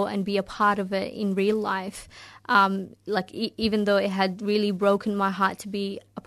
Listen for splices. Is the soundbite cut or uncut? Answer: uncut